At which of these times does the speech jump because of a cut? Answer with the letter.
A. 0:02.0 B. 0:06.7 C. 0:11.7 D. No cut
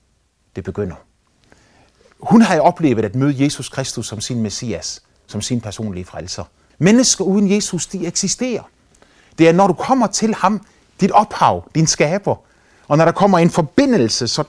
B